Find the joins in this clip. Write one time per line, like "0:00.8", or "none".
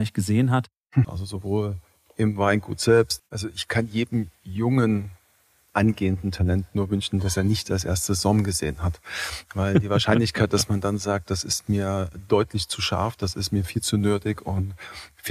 0:01.0
0:03.2